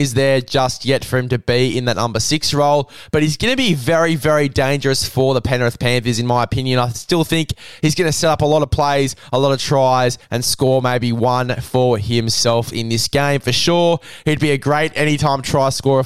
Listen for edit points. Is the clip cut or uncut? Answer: uncut